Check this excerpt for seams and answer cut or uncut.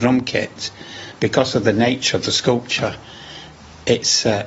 uncut